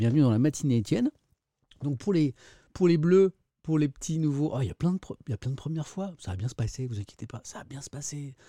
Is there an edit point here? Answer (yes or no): no